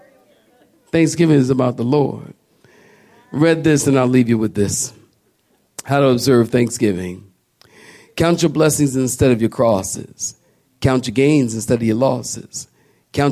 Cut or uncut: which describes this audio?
uncut